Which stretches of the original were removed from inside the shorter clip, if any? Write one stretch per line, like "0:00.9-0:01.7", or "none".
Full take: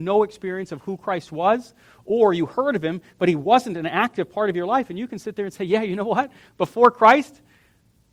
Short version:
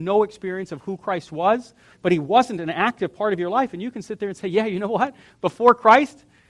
0:01.9-0:03.1